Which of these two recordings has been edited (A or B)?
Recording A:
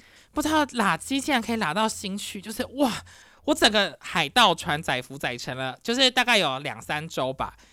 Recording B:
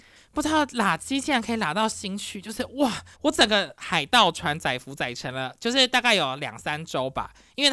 B